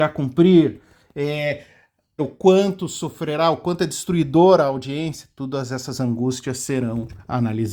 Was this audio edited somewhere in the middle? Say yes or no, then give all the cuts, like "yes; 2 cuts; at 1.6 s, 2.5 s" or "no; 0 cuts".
yes; 1 cut; at 2.2 s